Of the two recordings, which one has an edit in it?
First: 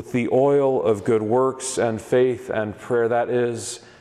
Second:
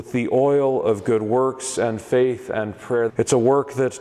second; 1 cut; at 3.1 s

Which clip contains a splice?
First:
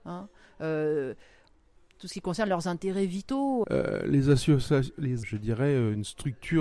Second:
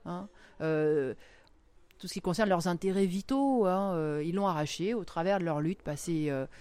first; 2 cuts; at 3.6 s, 5.2 s

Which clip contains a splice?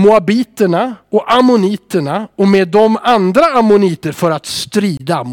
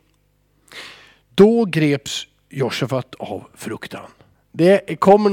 second; 1 cut; at 4.4 s

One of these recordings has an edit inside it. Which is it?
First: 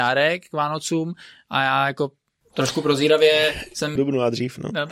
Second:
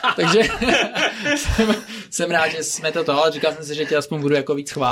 first; 1 cut; at 4.0 s

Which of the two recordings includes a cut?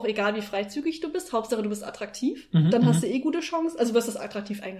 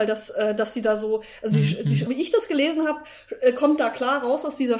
second; 1 cut; at 2.1 s

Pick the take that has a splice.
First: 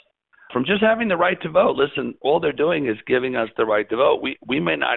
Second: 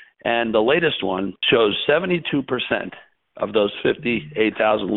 second; 1 cut; at 1.4 s

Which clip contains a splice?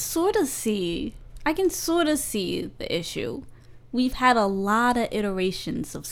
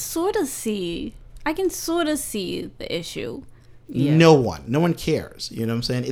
second; 1 cut; at 3.8 s

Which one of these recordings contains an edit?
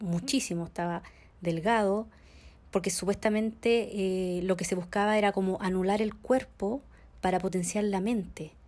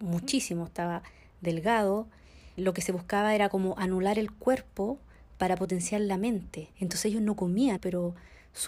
second; 3 cuts; at 2.6 s, 6.7 s, 7.8 s

